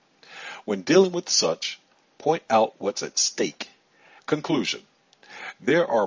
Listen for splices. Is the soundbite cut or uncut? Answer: cut